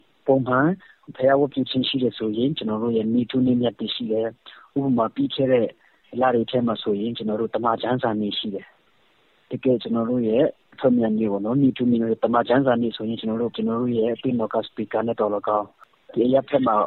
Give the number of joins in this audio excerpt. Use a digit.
1